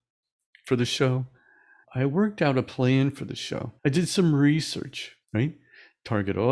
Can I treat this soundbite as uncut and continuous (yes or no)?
no